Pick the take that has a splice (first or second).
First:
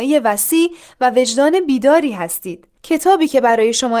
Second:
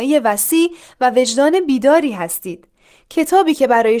first